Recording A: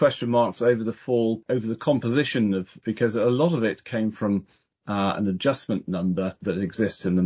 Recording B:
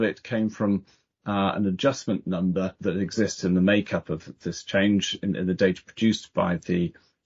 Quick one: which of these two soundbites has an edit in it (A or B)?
A